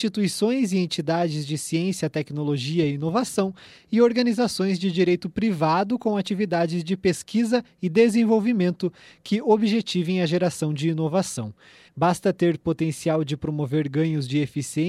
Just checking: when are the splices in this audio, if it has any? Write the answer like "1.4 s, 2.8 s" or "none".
11.9 s